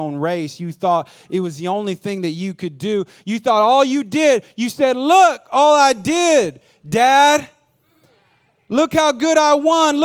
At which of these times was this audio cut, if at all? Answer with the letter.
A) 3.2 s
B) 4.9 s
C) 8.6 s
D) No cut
D